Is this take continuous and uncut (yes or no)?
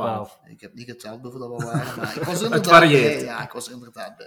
yes